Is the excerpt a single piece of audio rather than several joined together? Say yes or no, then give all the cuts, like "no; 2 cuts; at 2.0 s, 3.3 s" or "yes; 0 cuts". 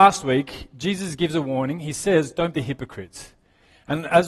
no; 1 cut; at 2.5 s